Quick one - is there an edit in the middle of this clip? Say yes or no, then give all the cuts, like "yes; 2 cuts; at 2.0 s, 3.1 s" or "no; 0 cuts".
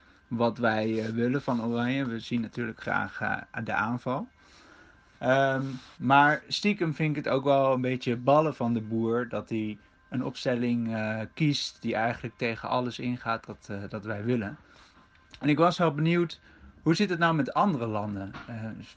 no; 0 cuts